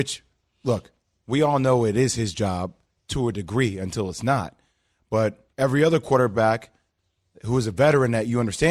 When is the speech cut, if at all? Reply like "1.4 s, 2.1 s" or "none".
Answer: 5.5 s